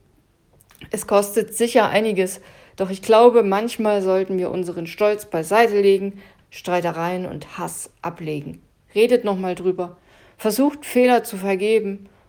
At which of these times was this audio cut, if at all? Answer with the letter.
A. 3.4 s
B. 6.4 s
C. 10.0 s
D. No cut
B